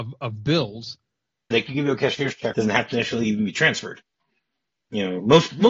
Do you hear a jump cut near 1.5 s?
yes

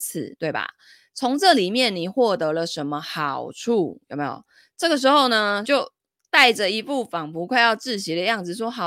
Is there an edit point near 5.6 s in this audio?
yes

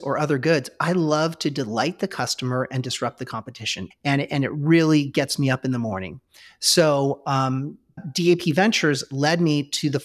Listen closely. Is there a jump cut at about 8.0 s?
yes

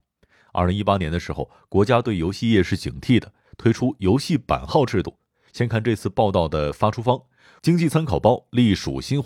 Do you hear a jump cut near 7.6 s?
yes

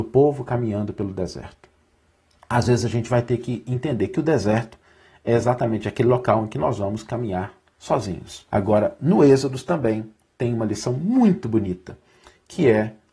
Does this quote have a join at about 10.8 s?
no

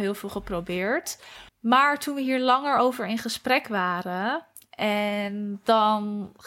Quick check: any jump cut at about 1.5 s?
yes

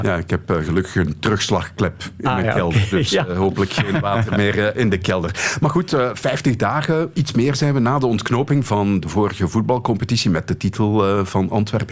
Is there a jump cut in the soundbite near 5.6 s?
no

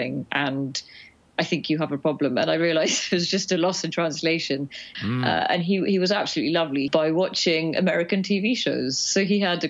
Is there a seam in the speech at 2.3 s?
no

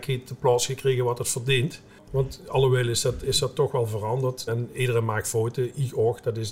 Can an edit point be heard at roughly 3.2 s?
no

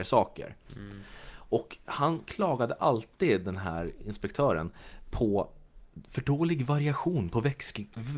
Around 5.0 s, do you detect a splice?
no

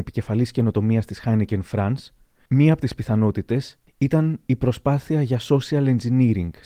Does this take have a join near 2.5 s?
no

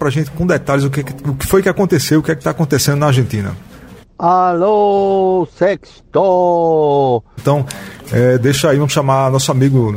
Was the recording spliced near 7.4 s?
yes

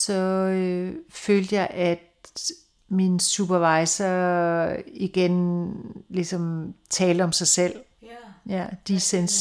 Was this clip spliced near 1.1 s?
no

